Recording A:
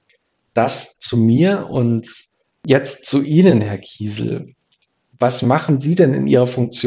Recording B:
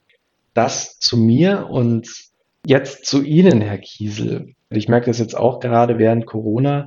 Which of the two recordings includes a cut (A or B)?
B